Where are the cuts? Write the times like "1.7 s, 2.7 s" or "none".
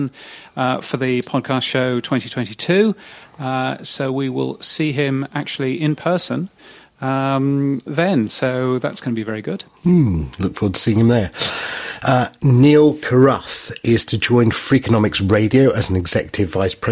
7.9 s

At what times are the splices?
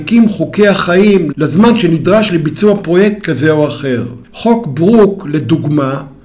1.3 s, 4.2 s

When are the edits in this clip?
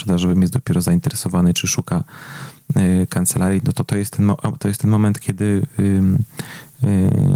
none

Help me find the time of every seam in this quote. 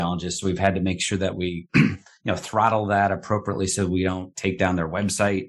4.3 s

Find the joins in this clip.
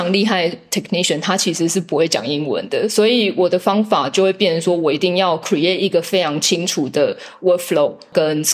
none

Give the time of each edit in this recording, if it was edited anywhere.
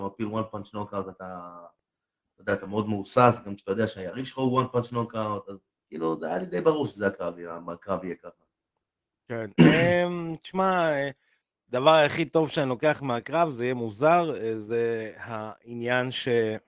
none

